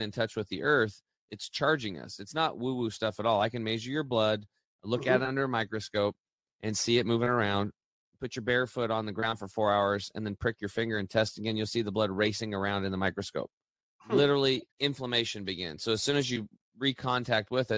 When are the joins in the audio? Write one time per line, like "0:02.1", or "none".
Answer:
0:14.7